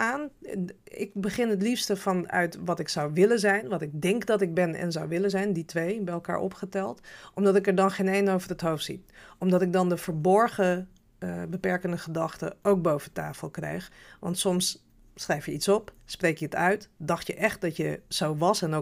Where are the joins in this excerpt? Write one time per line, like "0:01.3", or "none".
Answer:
none